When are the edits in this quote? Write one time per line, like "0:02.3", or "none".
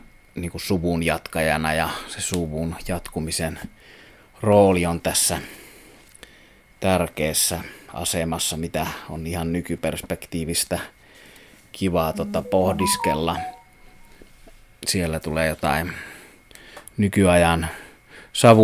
none